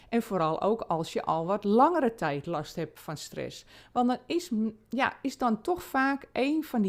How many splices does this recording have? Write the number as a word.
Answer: zero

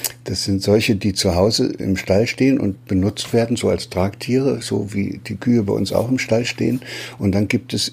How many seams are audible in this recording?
one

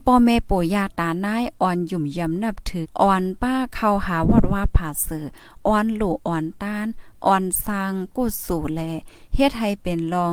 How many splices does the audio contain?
one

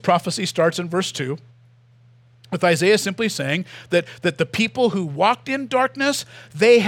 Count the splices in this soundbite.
zero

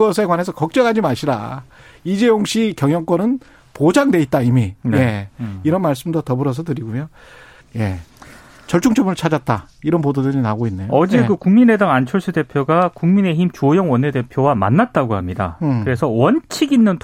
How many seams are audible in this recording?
one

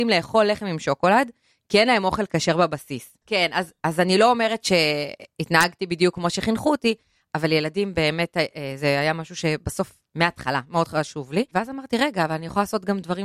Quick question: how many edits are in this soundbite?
one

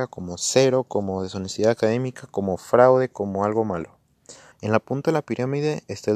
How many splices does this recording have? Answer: one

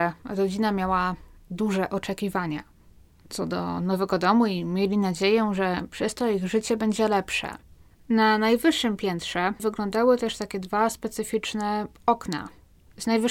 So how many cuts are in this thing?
one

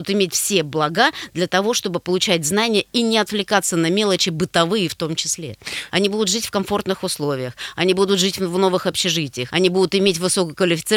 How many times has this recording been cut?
two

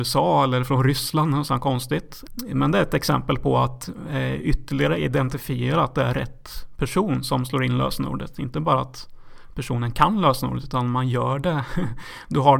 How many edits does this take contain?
one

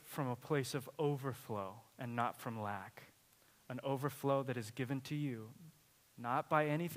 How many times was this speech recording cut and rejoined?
zero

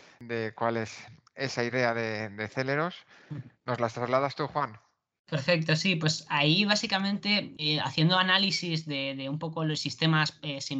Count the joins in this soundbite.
zero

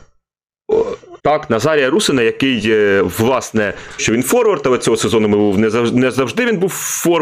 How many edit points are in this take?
two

